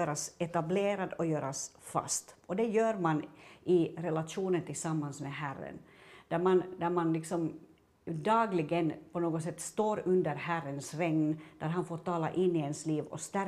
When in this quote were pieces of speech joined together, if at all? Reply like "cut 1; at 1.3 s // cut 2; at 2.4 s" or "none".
none